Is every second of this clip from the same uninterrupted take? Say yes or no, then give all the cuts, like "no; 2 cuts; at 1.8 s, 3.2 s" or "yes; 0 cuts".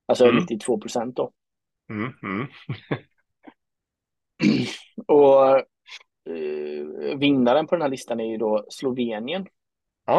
yes; 0 cuts